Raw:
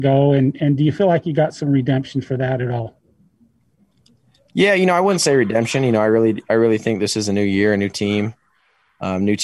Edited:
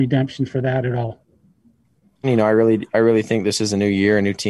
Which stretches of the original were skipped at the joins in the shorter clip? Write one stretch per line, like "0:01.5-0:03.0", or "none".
0:04.0-0:05.8

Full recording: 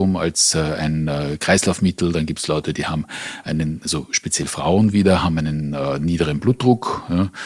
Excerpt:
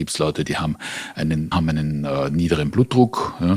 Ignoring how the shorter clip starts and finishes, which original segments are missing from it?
0:03.8-0:05.2

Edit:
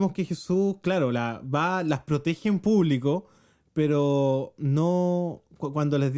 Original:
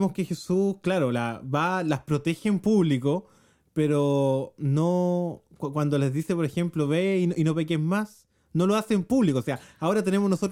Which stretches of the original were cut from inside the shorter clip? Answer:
none

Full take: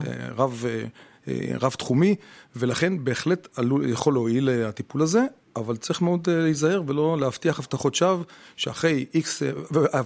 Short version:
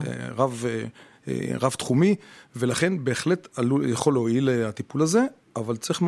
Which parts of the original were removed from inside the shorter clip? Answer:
none

